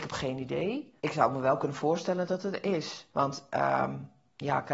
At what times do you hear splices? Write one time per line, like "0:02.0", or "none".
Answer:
0:01.0
0:03.1